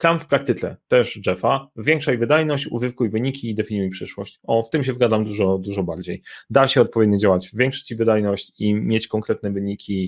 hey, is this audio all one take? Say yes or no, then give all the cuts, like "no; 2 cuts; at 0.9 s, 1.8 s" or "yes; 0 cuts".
yes; 0 cuts